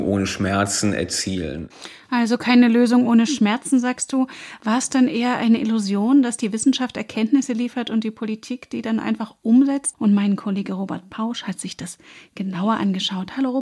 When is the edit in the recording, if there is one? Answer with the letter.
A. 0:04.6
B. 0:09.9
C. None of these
B